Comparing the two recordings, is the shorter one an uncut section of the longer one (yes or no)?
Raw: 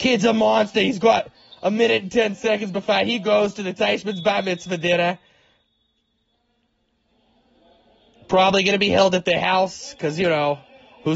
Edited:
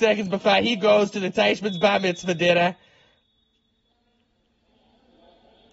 yes